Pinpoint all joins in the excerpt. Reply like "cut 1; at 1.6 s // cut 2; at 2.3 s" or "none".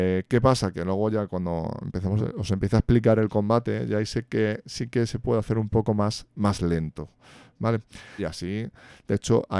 cut 1; at 2.2 s // cut 2; at 8.2 s

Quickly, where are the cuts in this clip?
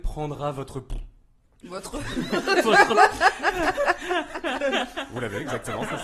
none

